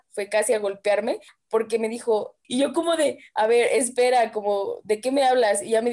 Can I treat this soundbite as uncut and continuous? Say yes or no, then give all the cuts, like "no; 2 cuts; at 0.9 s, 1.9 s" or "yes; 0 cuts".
no; 1 cut; at 2.4 s